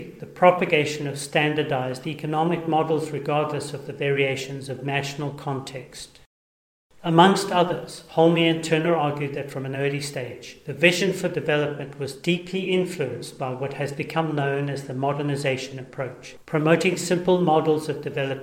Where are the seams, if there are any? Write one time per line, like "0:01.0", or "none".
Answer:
0:16.4